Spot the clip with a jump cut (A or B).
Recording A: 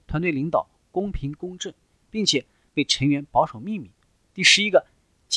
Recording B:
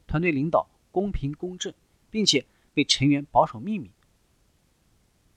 A